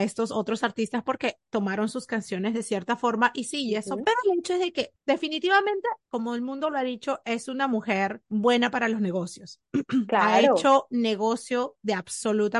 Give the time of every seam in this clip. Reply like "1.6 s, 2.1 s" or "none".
4.0 s